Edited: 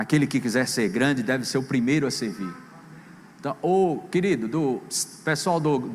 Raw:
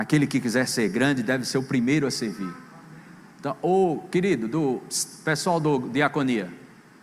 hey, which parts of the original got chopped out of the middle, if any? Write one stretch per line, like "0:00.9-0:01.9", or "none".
none

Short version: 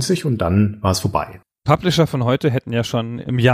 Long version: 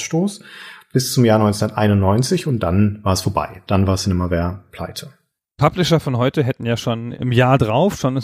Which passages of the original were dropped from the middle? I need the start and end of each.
0:03.6-0:05.4

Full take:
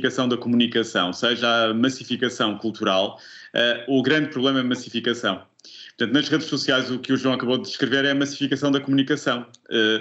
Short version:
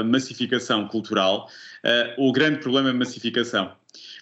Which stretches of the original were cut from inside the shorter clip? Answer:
none

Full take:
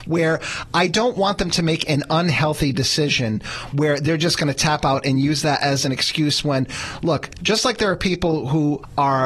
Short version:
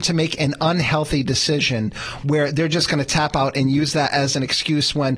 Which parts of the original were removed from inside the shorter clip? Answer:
none

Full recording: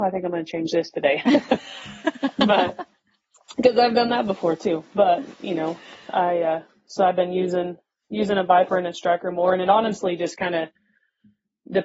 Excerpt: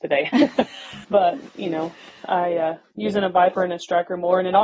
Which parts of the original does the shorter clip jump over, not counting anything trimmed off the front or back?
0:02.0-0:04.9
0:06.8-0:08.0

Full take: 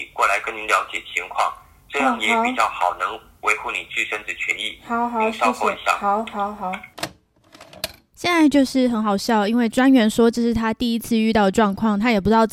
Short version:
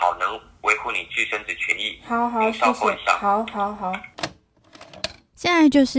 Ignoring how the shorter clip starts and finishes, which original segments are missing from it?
none

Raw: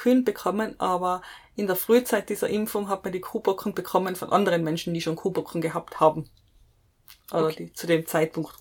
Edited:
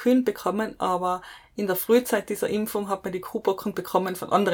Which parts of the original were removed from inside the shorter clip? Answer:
none

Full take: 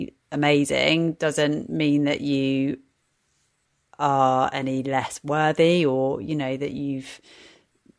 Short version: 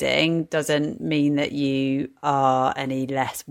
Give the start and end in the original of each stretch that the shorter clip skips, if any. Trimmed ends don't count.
0:02.9-0:03.9

